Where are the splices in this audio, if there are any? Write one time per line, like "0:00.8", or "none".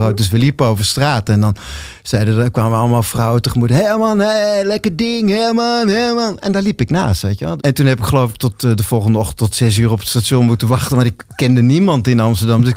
0:07.6